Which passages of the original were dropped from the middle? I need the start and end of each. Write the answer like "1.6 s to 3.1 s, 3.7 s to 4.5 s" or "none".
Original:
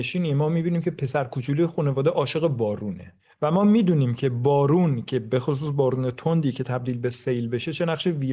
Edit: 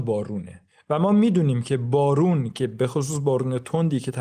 none